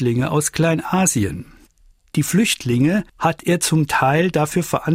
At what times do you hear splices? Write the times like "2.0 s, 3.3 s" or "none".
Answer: none